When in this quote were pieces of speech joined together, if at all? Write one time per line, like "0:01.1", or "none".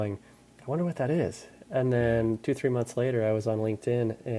none